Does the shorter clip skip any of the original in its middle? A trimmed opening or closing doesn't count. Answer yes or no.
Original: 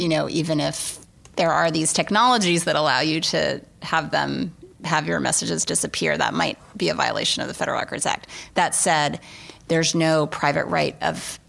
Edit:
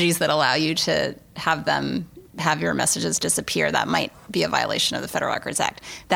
no